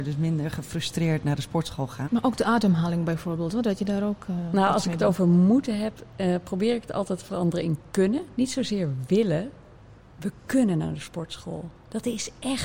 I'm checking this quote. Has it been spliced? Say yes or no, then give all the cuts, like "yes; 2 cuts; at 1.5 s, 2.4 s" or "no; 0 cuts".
yes; 1 cut; at 2.0 s